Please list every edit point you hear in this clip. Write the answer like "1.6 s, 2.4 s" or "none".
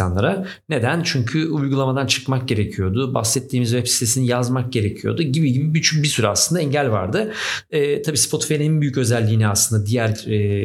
none